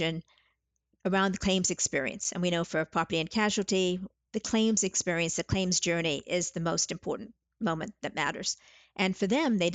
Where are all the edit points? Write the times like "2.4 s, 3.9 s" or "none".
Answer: 4.2 s